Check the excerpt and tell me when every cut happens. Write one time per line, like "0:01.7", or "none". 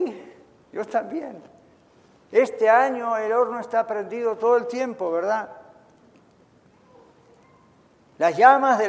none